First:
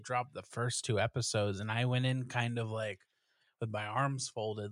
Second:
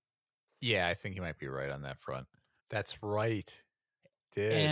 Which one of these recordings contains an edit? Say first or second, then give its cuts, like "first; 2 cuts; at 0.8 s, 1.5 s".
second; 1 cut; at 2.6 s